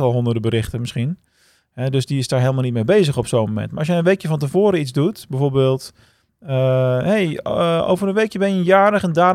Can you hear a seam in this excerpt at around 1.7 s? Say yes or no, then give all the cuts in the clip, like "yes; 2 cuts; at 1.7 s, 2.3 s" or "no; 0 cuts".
no; 0 cuts